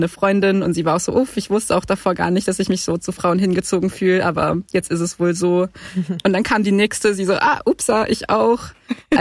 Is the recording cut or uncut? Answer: uncut